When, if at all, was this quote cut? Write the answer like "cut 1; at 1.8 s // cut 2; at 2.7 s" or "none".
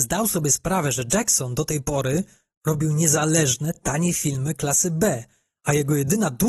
none